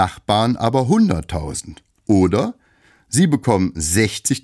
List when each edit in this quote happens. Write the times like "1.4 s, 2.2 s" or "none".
none